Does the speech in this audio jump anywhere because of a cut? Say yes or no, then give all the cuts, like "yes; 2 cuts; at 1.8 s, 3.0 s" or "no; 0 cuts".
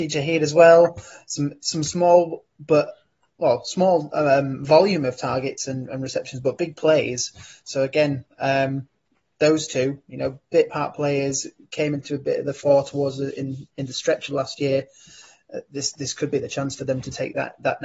no; 0 cuts